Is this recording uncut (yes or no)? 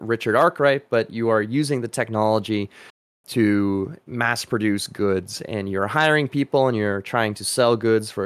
yes